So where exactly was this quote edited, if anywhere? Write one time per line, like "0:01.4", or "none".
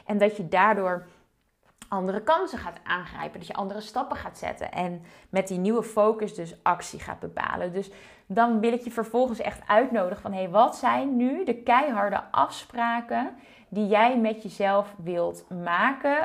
none